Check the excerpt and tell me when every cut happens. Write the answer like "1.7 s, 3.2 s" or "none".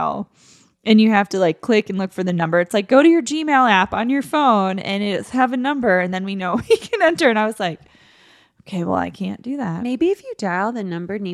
none